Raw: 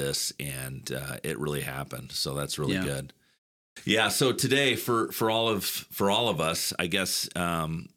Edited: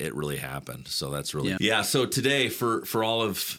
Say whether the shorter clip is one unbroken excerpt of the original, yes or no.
no